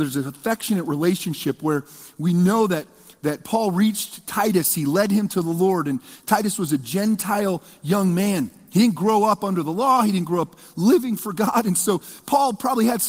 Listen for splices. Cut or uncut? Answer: uncut